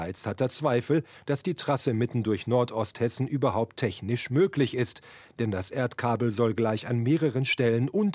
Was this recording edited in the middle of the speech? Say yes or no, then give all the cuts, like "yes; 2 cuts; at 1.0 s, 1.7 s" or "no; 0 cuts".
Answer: no; 0 cuts